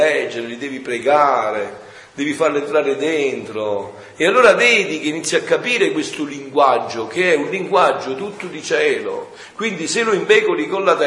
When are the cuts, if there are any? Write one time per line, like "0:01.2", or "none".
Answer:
none